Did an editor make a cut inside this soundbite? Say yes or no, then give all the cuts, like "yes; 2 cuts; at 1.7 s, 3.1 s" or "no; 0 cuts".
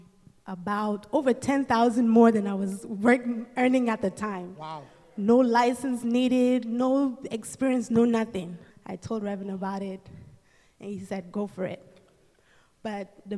yes; 1 cut; at 8.7 s